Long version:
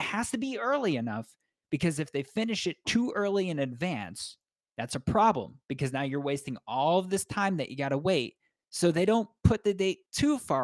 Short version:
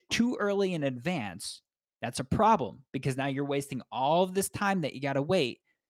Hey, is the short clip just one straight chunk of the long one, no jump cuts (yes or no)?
yes